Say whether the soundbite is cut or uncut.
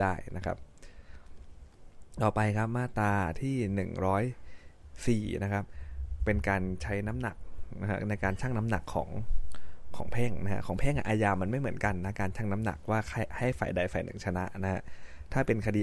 uncut